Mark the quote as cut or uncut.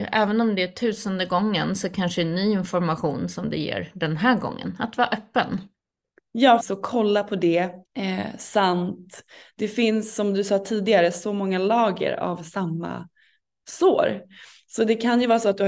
cut